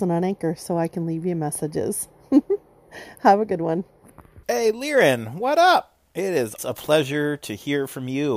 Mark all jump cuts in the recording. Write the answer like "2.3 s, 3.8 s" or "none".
4.4 s, 6.6 s